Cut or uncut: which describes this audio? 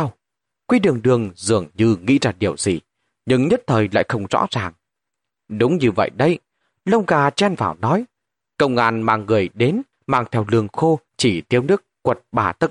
cut